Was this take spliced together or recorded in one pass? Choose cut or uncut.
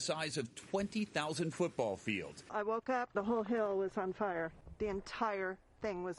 uncut